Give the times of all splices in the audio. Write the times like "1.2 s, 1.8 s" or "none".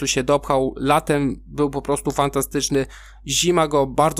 none